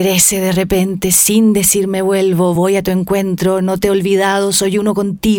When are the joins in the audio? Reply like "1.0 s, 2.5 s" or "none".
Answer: none